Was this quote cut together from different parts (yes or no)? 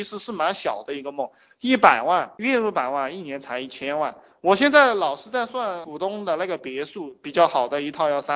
no